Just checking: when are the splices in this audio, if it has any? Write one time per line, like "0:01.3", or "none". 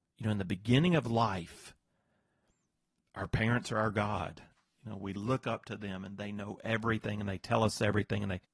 none